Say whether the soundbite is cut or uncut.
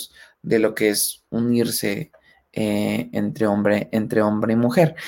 uncut